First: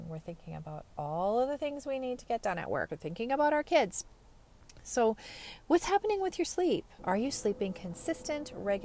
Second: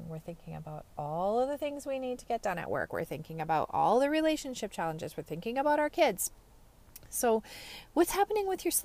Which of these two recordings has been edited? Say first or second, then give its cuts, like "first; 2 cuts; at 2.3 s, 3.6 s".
first; 2 cuts; at 2.9 s, 7.0 s